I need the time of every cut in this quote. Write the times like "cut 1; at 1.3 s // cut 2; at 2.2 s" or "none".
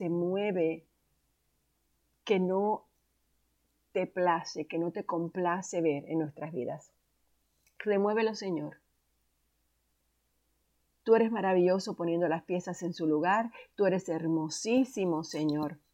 none

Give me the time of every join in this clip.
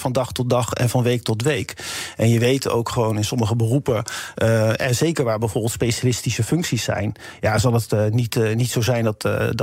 none

